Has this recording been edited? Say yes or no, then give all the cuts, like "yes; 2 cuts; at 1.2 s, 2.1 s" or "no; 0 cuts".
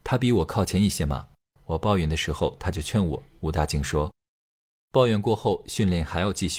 no; 0 cuts